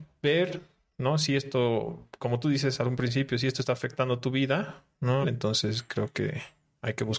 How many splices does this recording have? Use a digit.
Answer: 1